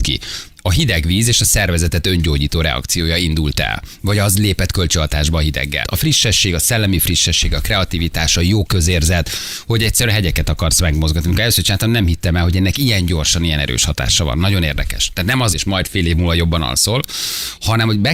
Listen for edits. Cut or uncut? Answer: cut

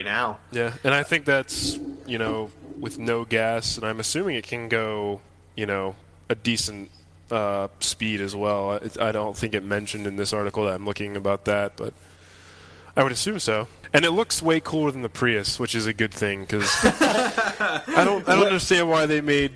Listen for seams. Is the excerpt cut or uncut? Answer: uncut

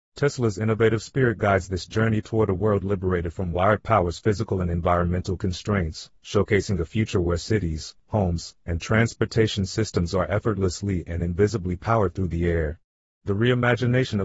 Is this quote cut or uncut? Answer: uncut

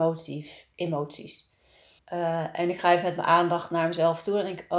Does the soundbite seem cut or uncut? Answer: cut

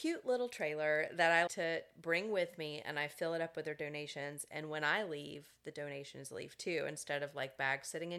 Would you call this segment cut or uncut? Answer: cut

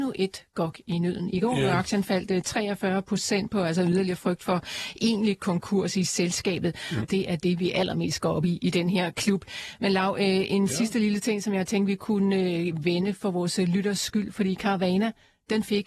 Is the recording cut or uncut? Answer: cut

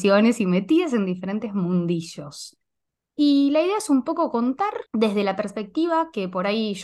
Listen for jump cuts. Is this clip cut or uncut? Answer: cut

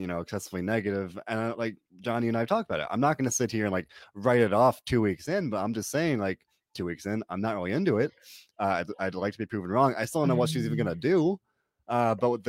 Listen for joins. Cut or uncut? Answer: uncut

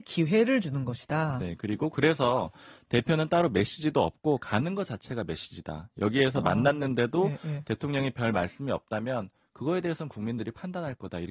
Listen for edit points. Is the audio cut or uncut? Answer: uncut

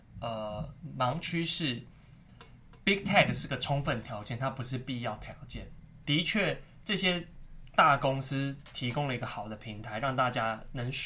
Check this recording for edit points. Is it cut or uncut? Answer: cut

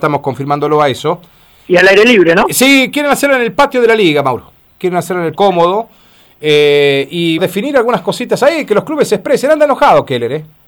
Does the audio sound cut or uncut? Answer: cut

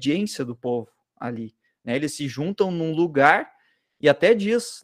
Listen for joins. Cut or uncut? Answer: uncut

